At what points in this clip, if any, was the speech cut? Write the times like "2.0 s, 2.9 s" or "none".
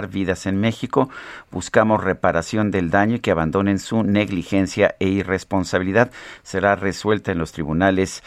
none